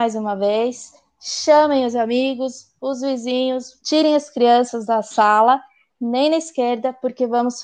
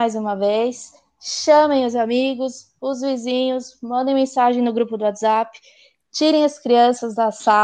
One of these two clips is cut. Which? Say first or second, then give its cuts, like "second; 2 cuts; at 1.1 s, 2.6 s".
first; 2 cuts; at 3.8 s, 5.9 s